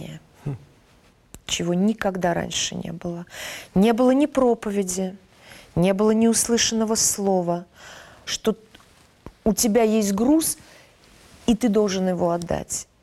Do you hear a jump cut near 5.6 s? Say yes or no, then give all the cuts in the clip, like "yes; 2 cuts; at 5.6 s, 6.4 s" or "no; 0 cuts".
no; 1 cut; at 8.3 s